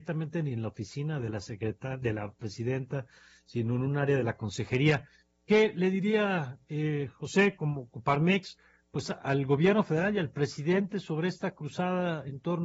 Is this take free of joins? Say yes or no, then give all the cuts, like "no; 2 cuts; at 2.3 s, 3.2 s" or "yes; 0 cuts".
yes; 0 cuts